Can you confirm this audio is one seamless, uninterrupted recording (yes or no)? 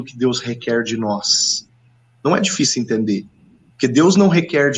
yes